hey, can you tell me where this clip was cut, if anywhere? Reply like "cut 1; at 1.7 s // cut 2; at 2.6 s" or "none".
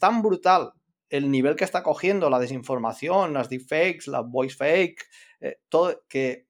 none